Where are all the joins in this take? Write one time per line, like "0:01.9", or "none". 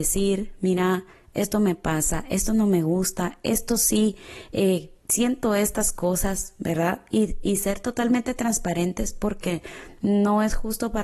none